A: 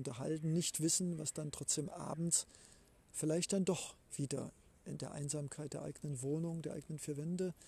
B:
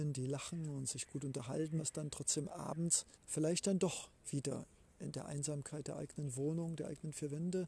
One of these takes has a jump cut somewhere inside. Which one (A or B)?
B